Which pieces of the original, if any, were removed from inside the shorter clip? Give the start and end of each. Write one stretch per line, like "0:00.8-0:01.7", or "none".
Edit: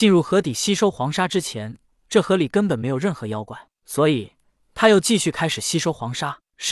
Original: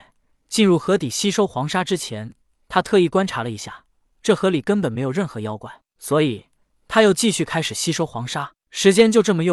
0:02.4-0:04.0